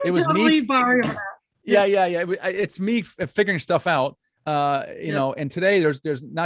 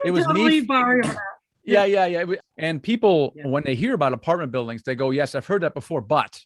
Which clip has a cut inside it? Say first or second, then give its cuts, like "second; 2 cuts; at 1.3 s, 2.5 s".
second; 1 cut; at 2.4 s